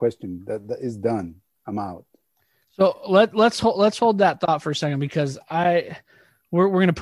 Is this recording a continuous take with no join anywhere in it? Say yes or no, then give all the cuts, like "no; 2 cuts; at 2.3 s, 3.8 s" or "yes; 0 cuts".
yes; 0 cuts